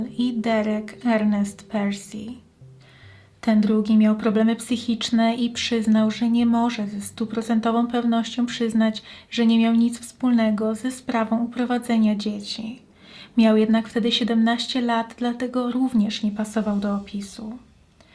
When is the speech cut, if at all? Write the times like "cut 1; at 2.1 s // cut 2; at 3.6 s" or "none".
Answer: none